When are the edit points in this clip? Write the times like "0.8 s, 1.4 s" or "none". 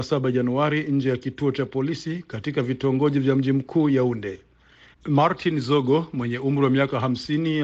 4.9 s